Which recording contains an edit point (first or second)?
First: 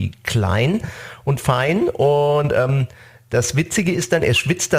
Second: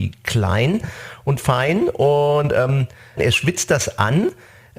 second